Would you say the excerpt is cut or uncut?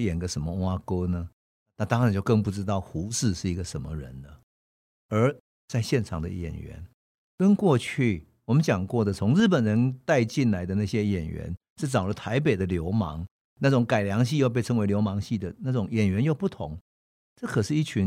uncut